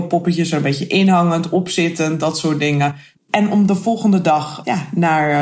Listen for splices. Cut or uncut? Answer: cut